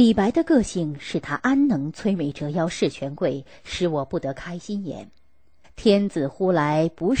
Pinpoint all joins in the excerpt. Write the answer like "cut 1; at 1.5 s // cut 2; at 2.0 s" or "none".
cut 1; at 5.6 s